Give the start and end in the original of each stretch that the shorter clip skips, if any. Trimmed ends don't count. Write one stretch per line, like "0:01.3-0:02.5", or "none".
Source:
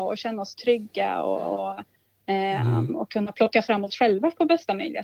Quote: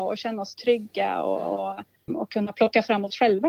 0:02.1-0:02.9